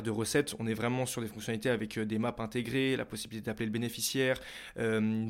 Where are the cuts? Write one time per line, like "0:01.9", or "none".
none